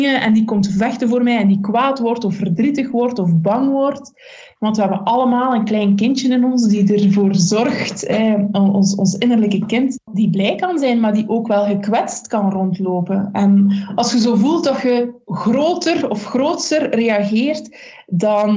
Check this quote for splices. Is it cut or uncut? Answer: uncut